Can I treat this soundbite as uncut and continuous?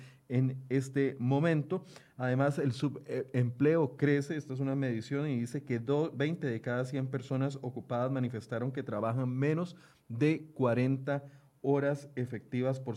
yes; 0 cuts

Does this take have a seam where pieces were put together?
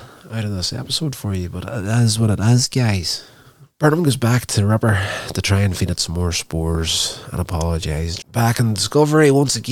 yes; 2 cuts; at 3.7 s, 8.2 s

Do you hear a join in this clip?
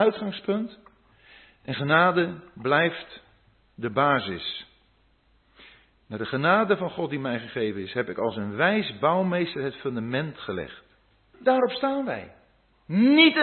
yes; 1 cut; at 11.3 s

